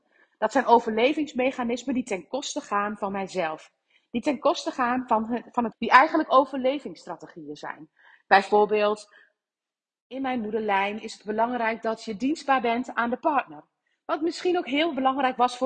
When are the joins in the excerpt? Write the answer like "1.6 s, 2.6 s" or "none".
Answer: 5.7 s